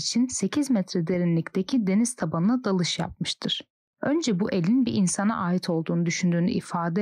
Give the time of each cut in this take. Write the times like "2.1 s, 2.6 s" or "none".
none